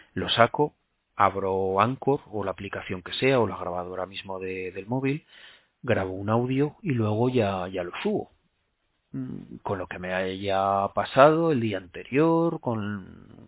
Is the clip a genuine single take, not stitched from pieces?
yes; 0 cuts

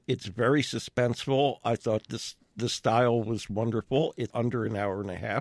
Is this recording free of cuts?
no; 1 cut; at 4.3 s

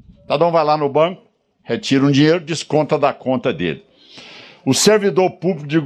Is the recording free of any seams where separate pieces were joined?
yes; 0 cuts

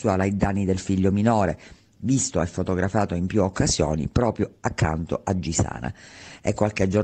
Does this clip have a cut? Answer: no; 0 cuts

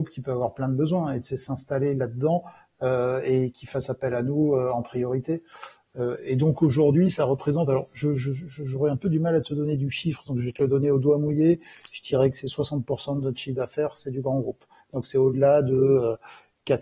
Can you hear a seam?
no; 0 cuts

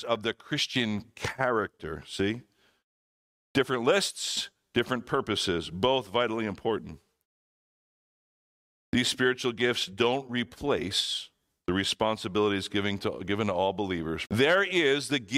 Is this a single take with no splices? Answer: no; 1 cut; at 14.3 s

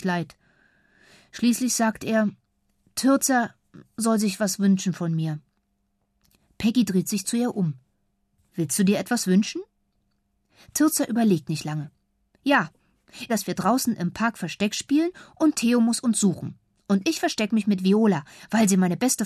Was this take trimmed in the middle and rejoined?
yes; 1 cut; at 13.3 s

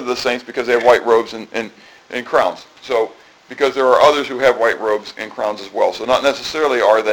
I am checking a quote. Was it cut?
no; 0 cuts

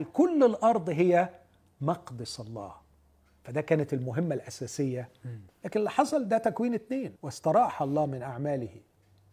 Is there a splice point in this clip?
yes; 2 cuts; at 5.5 s, 7.2 s

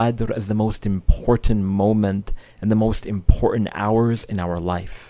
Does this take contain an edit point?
no; 0 cuts

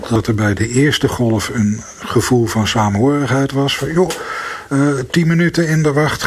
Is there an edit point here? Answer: no; 0 cuts

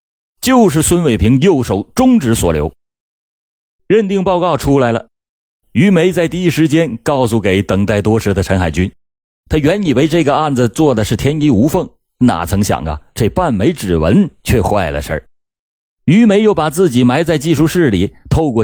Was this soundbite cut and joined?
yes; 2 cuts; at 9.3 s, 15.9 s

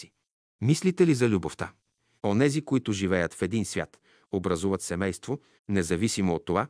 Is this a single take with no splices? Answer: no; 2 cuts; at 2.2 s, 5.6 s

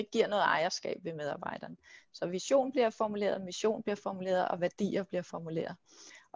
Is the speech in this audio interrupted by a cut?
no; 0 cuts

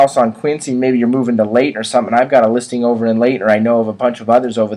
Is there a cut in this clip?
no; 0 cuts

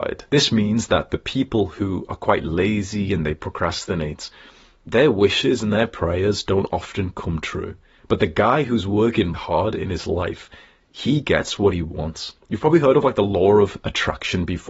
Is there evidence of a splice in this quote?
yes; 1 cut; at 9.3 s

